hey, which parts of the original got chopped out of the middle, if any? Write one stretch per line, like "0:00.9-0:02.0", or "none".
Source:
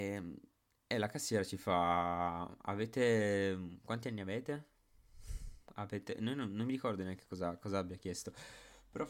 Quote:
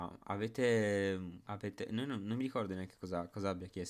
0:03.8-0:05.7